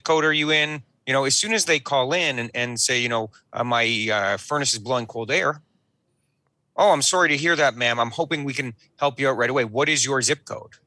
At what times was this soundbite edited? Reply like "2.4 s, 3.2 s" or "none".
none